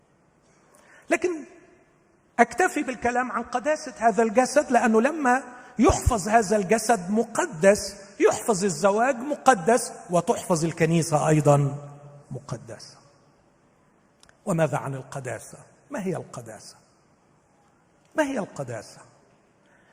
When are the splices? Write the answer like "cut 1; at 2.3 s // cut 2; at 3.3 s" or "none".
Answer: none